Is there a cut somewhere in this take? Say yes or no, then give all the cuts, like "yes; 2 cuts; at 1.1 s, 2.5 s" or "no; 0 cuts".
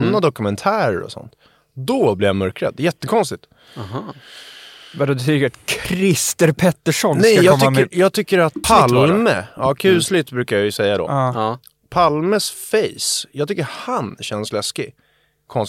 yes; 1 cut; at 8.6 s